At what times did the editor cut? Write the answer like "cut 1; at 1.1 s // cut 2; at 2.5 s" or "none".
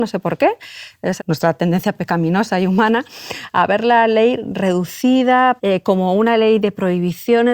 cut 1; at 1.2 s // cut 2; at 5.6 s